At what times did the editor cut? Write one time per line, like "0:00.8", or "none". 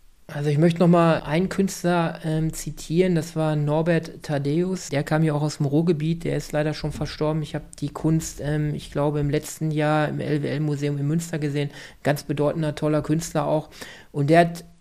none

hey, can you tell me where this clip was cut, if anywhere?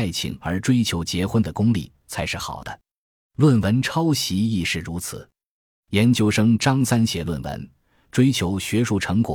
none

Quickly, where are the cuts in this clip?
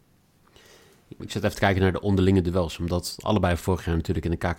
0:01.2

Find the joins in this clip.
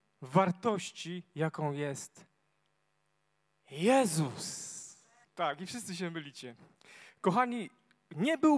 0:05.2

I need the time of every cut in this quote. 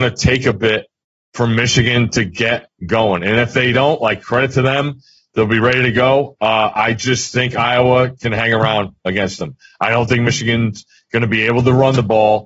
none

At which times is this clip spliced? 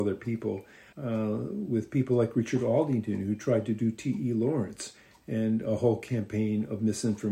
0:00.9

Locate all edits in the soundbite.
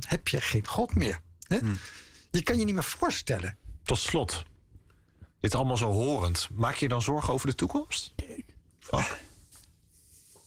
none

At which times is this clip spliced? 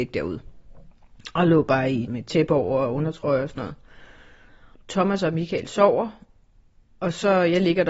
0:02.1

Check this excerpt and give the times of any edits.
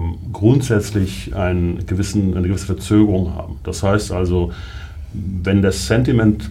none

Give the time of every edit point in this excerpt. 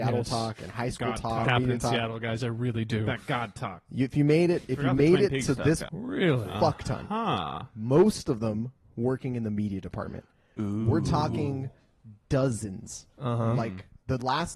0:01.4
0:05.9

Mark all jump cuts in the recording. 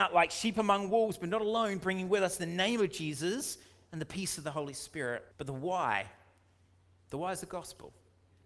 0:05.3

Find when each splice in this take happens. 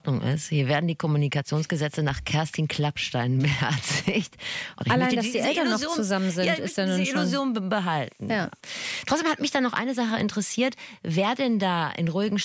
0:04.8

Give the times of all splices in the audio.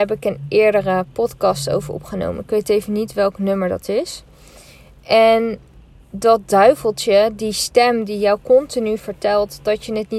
none

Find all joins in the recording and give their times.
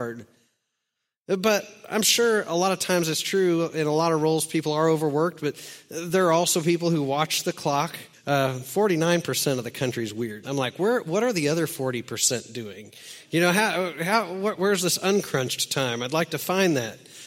0:08.1
0:10.4

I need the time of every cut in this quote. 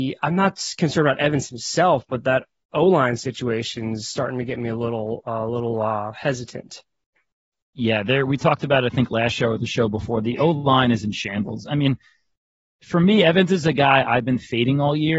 none

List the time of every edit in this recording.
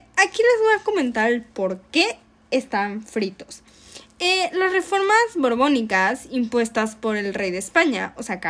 none

